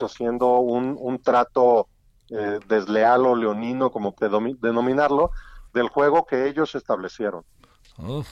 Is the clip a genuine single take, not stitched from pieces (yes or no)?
no